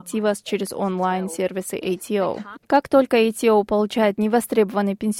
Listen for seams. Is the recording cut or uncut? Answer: cut